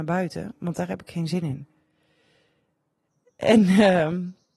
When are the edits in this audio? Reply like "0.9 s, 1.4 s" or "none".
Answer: none